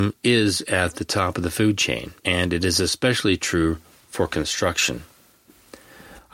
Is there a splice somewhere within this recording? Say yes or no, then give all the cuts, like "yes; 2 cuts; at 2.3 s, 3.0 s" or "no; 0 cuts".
yes; 1 cut; at 2.2 s